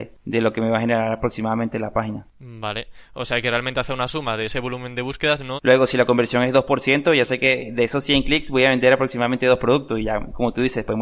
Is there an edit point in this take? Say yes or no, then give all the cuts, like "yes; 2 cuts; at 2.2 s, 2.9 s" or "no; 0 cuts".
yes; 1 cut; at 5.6 s